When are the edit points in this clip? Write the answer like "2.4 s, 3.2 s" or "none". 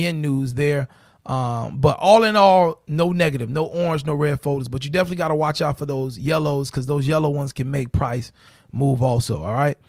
none